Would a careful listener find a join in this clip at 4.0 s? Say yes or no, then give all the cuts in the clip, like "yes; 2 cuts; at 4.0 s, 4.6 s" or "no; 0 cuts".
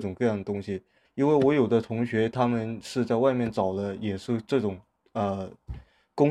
no; 1 cut; at 1.1 s